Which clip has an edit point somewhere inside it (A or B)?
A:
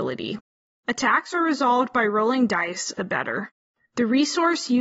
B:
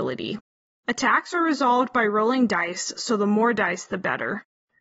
A